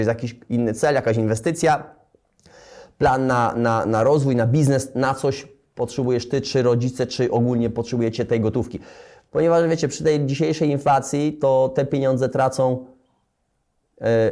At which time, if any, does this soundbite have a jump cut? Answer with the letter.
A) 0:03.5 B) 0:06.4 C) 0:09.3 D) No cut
C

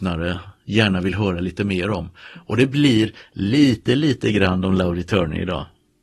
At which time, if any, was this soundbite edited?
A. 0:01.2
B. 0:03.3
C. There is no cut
C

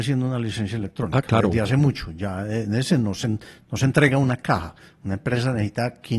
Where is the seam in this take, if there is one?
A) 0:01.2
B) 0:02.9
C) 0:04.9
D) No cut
D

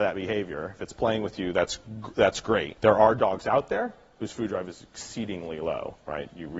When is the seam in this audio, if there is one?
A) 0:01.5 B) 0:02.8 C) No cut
B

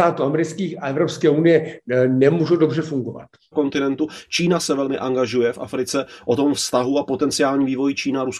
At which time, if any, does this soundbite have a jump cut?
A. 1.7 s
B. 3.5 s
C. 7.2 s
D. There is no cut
B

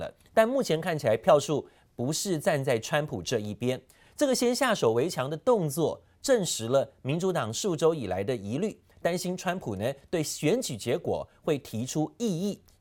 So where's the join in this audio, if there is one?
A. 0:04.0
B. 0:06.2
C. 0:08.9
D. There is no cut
D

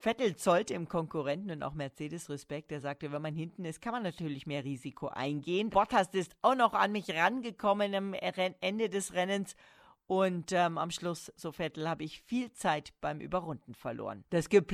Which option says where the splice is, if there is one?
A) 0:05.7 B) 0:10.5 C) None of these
A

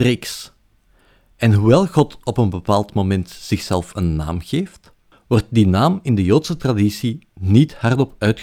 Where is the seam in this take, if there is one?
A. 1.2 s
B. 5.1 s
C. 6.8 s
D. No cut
B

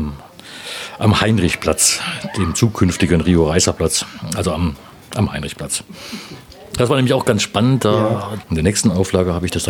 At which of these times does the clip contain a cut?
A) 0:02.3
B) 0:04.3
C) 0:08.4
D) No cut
C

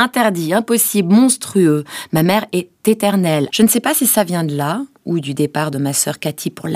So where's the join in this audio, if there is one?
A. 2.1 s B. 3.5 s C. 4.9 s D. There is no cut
B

